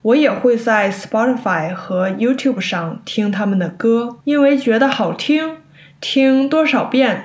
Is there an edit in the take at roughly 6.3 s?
no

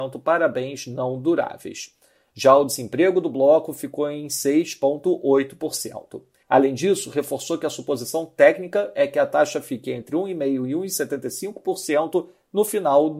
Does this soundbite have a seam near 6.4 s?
yes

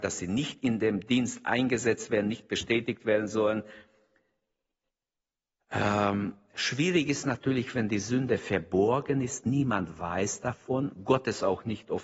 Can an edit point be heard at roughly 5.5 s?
no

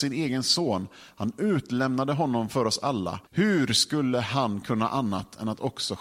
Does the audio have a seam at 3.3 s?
yes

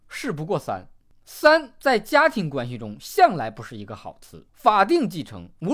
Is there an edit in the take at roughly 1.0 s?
no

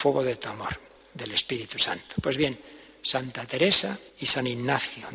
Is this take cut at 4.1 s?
yes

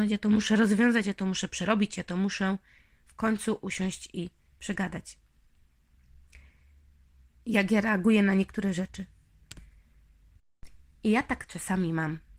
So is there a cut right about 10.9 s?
no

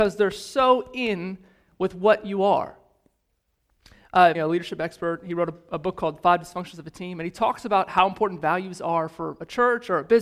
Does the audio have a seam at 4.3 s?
yes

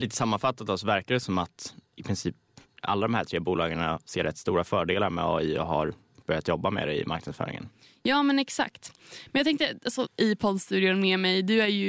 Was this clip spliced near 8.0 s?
no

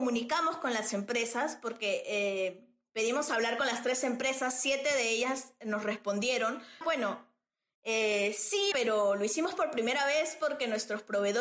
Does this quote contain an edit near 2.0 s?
no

